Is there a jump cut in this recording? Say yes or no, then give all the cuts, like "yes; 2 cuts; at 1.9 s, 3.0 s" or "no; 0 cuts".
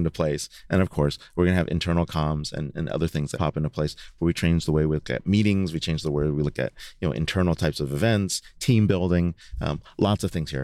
yes; 1 cut; at 3.3 s